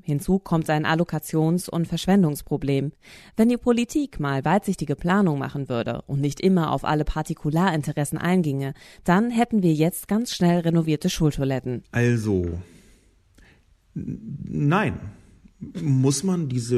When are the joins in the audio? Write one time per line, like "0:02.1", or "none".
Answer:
none